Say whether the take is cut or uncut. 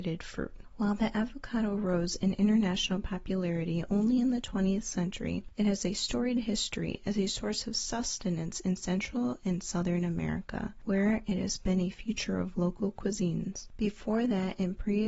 cut